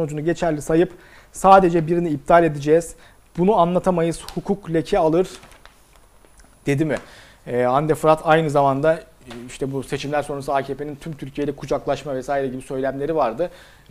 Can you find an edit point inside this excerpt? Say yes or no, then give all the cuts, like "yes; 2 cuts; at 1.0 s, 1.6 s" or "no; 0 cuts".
no; 0 cuts